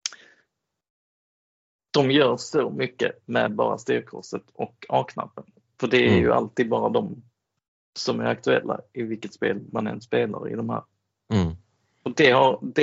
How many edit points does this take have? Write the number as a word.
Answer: zero